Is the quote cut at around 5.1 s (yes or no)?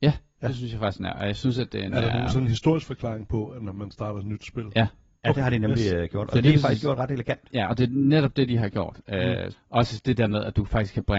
no